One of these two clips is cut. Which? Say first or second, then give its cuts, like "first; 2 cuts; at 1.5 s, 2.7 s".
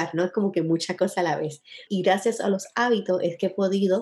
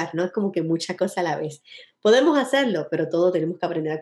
first; 1 cut; at 1.9 s